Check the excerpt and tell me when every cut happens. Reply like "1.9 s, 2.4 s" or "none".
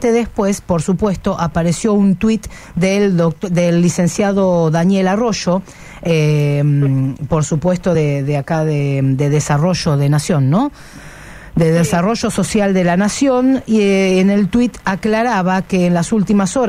none